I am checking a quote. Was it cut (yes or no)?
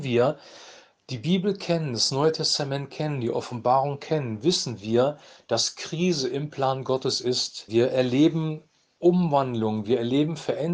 yes